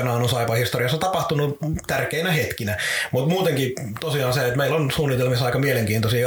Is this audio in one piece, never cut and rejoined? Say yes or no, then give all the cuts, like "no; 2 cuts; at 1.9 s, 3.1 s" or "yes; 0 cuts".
yes; 0 cuts